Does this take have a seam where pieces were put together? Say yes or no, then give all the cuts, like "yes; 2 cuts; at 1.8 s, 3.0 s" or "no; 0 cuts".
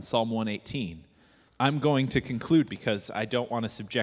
yes; 2 cuts; at 1.5 s, 2.7 s